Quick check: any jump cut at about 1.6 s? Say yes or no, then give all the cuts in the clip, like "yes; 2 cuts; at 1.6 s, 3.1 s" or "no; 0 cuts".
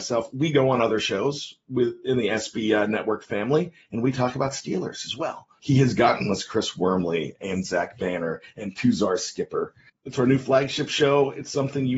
no; 2 cuts; at 5.6 s, 9.9 s